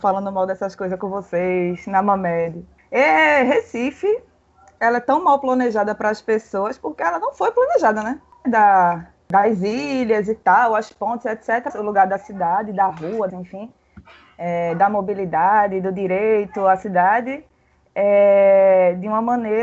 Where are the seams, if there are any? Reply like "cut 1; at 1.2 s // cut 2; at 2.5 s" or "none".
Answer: cut 1; at 8.4 s // cut 2; at 11.7 s // cut 3; at 13.3 s